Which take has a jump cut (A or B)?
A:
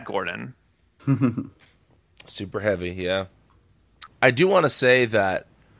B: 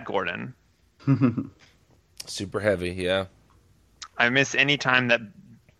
A